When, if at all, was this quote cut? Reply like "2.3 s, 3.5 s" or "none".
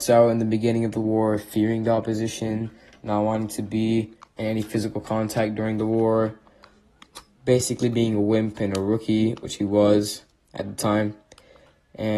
none

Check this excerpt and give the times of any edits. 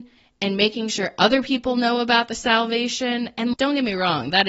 3.5 s

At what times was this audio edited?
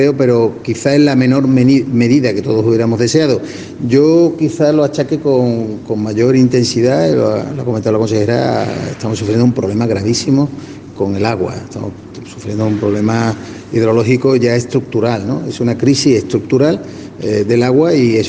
none

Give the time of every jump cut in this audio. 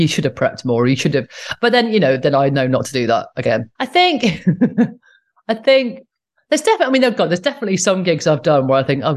3.8 s

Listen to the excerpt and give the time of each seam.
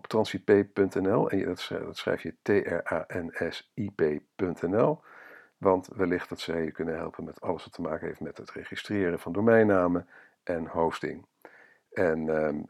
none

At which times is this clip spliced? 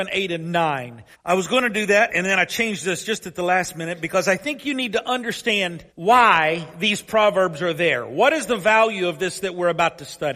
1.1 s, 5.9 s

